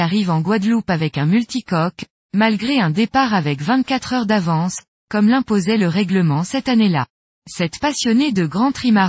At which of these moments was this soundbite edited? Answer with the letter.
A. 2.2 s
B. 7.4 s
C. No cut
B